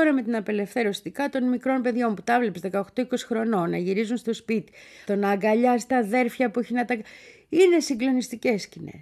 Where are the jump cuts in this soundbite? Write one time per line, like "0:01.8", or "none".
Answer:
0:05.0